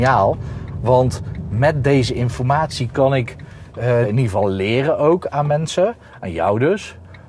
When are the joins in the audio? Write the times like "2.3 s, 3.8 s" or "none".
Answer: 4.0 s